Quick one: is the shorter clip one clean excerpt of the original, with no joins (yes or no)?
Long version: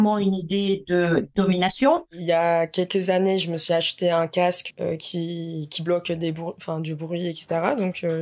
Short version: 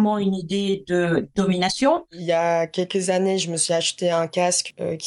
yes